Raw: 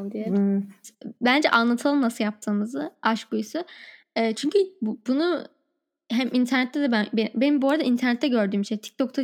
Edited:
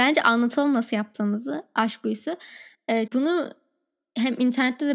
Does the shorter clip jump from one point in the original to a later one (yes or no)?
yes